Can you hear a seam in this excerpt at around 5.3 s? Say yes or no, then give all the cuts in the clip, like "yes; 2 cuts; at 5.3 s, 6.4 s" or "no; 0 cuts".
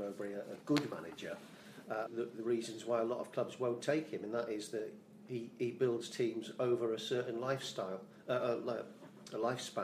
no; 1 cut; at 2.1 s